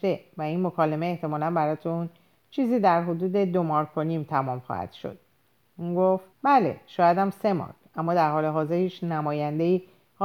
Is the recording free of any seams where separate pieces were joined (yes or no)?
no